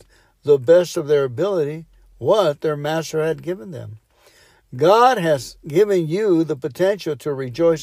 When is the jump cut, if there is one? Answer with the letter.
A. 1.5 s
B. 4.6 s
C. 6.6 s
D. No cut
D